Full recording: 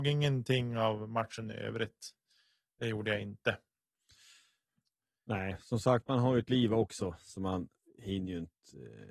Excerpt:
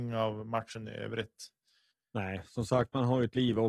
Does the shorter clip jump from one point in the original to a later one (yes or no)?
yes